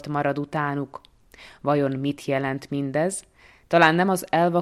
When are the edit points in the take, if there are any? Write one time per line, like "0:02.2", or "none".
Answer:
none